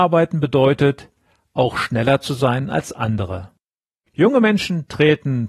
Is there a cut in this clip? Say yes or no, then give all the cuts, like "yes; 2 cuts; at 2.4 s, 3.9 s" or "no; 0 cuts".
yes; 1 cut; at 4.1 s